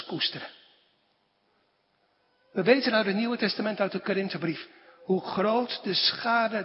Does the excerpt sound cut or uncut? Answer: uncut